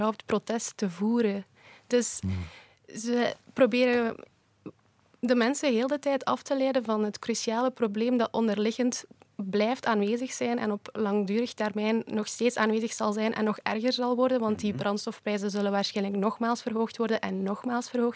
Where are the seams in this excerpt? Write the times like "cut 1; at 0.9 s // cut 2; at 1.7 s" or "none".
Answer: none